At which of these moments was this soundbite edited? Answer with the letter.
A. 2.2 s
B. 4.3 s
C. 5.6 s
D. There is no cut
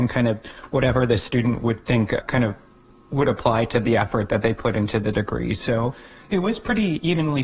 A